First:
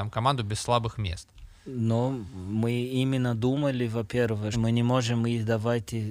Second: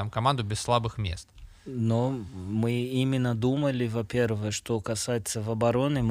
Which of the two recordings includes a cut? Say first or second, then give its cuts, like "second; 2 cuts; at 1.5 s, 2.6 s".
first; 1 cut; at 4.5 s